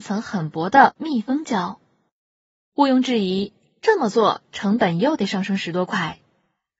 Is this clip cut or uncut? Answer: uncut